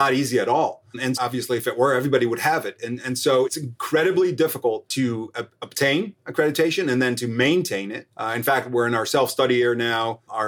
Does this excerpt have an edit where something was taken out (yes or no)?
yes